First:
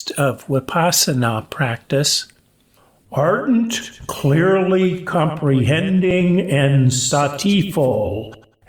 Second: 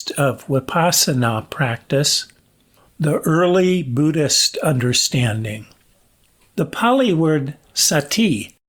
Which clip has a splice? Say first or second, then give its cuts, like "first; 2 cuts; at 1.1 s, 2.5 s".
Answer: second; 1 cut; at 2.9 s